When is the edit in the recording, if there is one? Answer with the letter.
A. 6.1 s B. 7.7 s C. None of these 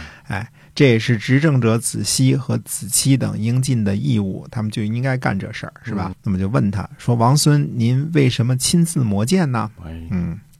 A